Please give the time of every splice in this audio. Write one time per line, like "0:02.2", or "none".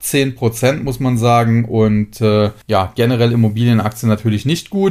0:02.6